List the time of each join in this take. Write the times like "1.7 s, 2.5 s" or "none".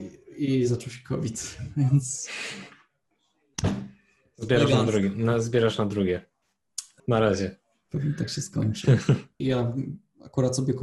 7.0 s, 9.4 s

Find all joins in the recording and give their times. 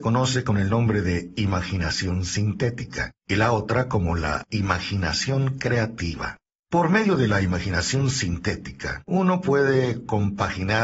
none

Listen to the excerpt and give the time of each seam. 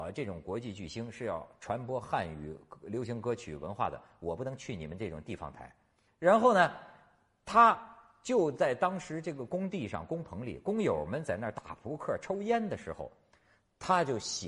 6.1 s

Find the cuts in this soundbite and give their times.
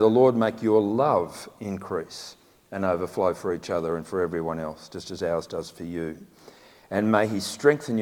none

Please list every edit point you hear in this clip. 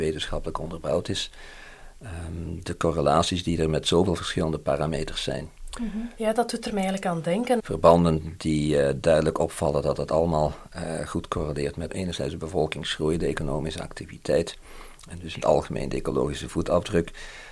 6.2 s, 7.6 s, 11.9 s

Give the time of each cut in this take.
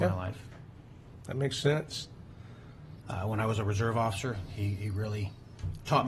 3.0 s

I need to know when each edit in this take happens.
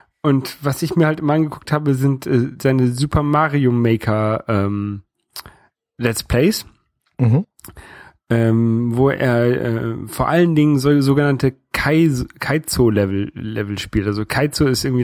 none

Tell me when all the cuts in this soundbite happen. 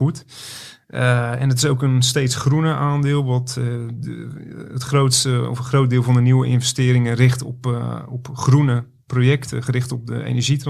4.0 s

